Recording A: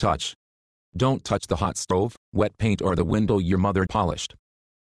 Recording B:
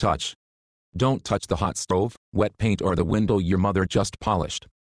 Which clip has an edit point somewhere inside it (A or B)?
A